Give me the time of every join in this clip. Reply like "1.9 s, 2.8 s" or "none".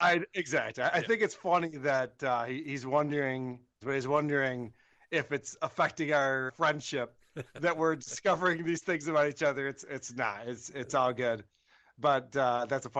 3.8 s, 6.5 s